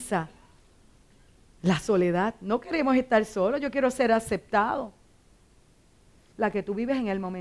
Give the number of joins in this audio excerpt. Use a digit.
1